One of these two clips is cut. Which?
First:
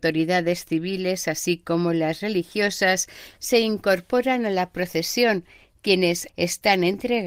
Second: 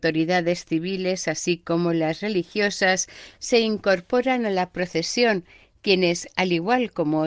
first; 1 cut; at 6.3 s

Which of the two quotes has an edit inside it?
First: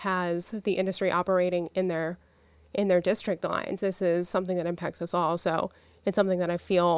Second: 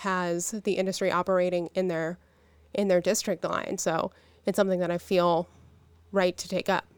second; 1 cut; at 3.8 s

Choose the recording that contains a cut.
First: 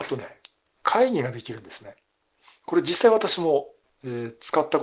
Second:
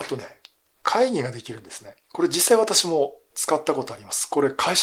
second; 2 cuts; at 2.0 s, 3.3 s

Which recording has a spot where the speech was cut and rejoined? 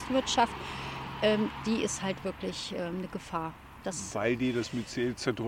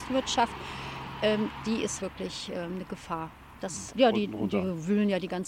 second; 2 cuts; at 2.0 s, 3.9 s

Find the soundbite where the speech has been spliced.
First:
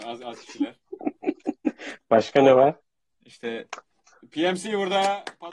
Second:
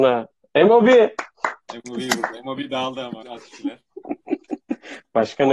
second; 1 cut; at 3.2 s

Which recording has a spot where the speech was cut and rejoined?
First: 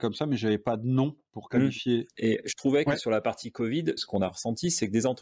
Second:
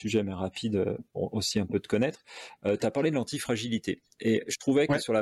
first; 2 cuts; at 2.1 s, 4.0 s

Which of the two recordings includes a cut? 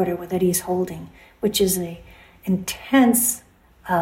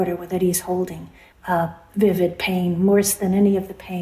second; 1 cut; at 1.3 s

